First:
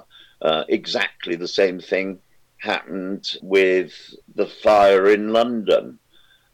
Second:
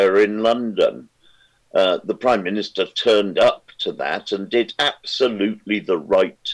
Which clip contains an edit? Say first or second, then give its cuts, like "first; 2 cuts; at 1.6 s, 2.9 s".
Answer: first; 1 cut; at 3.4 s